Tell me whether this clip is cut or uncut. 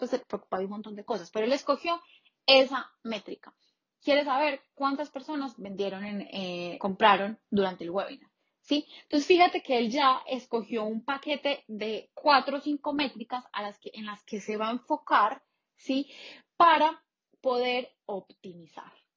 cut